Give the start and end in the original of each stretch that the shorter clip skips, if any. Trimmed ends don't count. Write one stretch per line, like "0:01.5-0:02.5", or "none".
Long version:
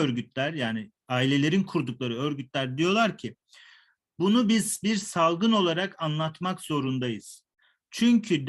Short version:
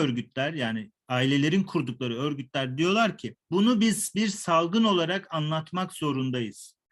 0:03.4-0:04.1